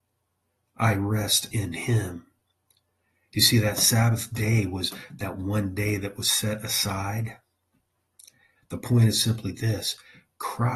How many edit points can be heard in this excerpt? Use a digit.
2